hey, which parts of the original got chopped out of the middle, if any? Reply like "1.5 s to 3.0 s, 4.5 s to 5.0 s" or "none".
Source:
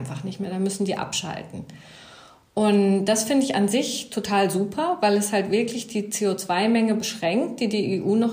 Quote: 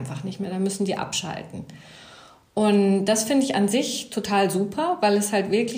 none